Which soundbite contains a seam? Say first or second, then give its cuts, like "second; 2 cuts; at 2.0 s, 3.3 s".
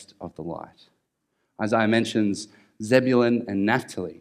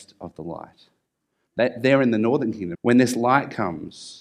second; 2 cuts; at 1.5 s, 2.7 s